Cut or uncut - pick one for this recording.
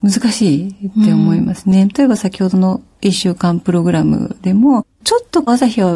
cut